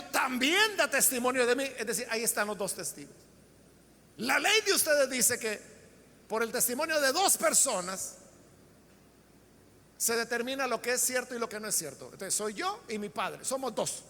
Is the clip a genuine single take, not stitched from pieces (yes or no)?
yes